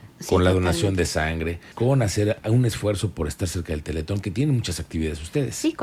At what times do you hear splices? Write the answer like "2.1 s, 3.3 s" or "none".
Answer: 1.7 s